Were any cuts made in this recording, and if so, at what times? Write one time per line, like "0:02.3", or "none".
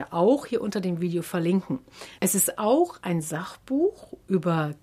0:02.2